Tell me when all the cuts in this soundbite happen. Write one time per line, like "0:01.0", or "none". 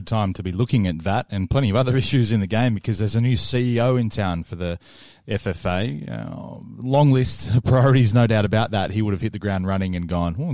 none